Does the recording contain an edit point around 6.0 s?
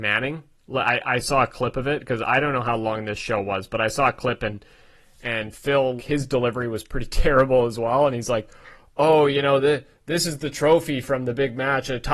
yes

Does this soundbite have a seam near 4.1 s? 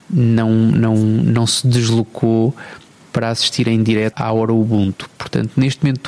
yes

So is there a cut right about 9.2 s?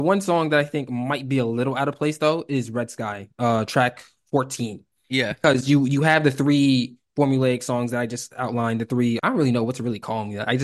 yes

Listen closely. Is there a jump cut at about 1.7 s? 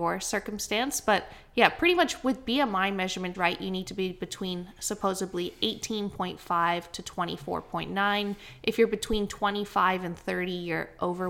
no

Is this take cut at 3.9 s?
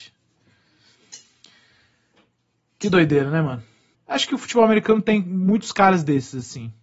yes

